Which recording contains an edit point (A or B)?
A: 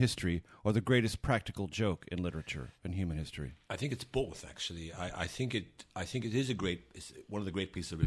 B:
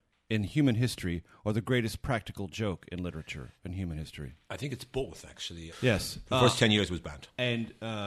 B